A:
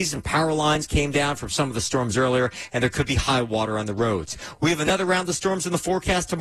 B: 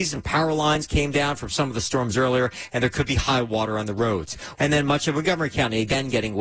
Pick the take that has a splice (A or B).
B